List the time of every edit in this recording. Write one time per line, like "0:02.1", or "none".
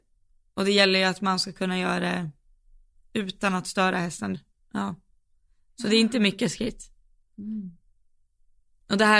0:04.3